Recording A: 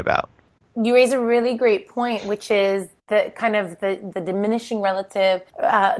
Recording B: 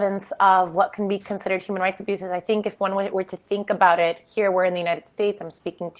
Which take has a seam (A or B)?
A